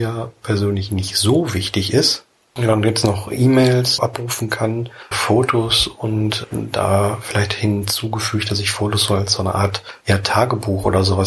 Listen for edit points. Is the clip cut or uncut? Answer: cut